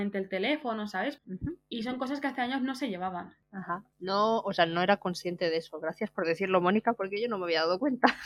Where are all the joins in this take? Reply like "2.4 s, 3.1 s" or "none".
1.2 s